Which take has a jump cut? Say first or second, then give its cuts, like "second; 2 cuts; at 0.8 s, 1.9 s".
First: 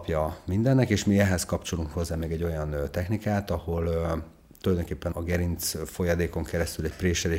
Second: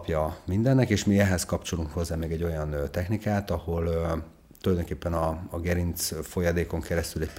first; 1 cut; at 5.1 s